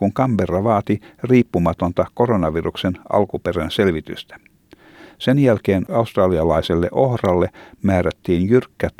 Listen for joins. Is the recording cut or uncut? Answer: uncut